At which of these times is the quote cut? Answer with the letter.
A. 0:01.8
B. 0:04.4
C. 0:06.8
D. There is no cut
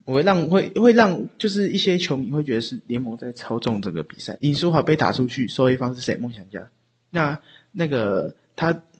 B